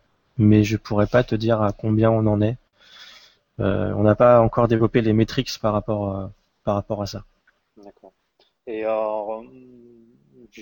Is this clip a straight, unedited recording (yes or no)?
yes